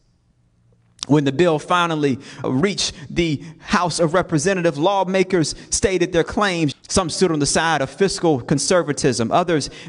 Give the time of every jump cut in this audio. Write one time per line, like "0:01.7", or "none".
0:02.4
0:06.7